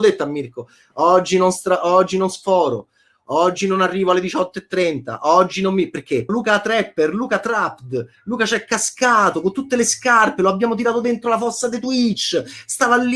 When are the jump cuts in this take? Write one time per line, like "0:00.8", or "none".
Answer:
0:06.3